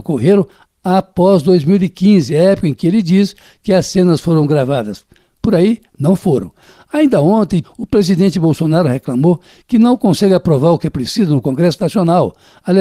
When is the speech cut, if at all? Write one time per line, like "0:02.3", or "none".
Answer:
0:07.6